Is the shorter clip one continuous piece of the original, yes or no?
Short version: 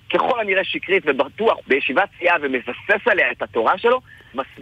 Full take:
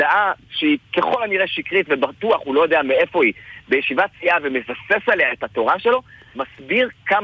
no